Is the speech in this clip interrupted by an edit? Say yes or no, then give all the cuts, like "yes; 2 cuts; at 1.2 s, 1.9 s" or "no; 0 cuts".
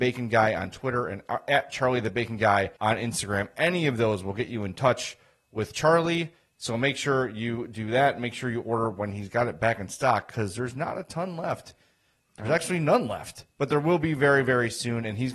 yes; 1 cut; at 2.8 s